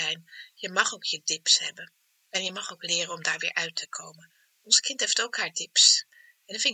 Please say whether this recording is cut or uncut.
uncut